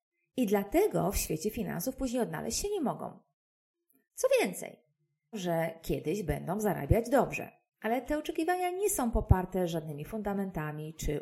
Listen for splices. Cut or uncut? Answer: cut